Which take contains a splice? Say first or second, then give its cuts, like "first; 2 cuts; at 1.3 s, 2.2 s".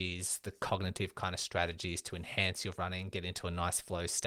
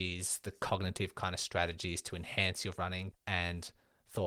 second; 1 cut; at 3.1 s